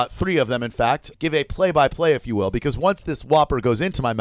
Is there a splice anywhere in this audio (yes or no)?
yes